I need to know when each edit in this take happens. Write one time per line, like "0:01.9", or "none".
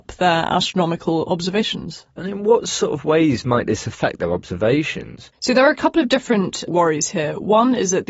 none